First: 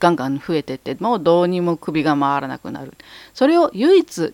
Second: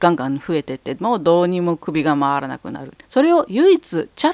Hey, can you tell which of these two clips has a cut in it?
second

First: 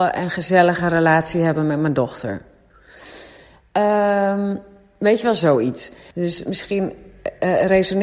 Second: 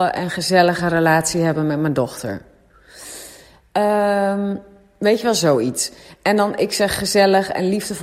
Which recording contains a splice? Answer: first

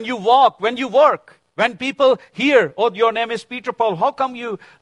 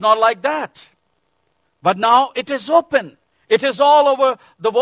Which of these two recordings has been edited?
first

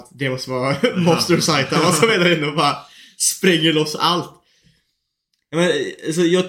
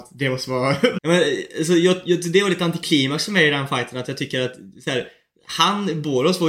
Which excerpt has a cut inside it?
second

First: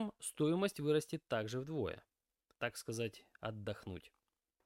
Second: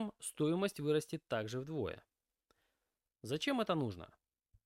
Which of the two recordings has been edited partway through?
first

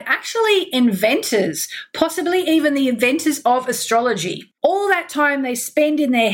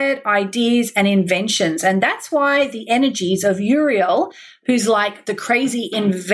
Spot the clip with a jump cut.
first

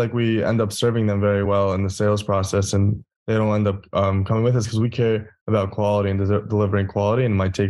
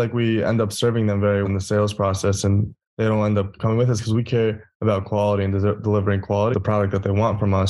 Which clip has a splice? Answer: second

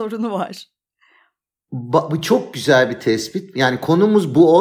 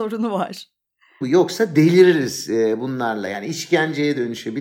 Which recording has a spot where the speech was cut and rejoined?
second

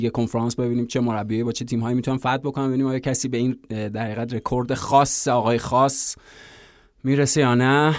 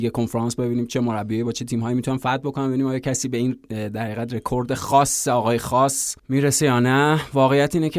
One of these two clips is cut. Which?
second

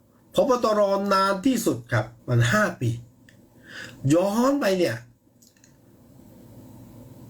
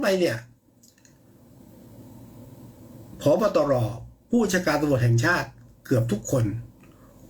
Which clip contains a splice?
first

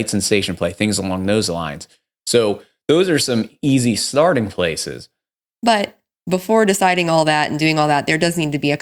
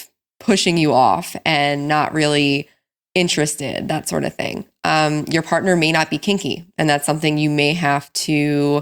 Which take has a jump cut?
first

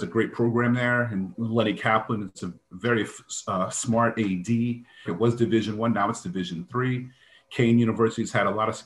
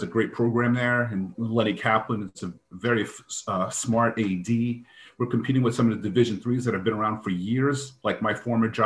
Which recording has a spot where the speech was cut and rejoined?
first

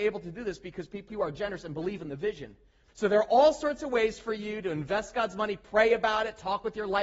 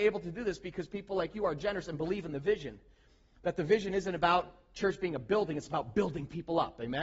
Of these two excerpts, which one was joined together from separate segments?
first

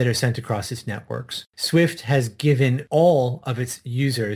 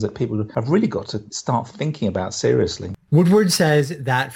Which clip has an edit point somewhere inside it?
second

